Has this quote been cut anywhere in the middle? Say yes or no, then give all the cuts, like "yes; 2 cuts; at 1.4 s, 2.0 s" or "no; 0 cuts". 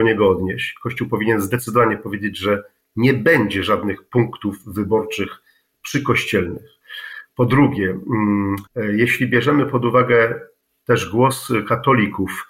yes; 1 cut; at 8.7 s